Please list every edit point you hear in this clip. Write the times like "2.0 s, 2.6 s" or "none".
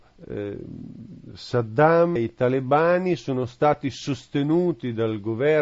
2.2 s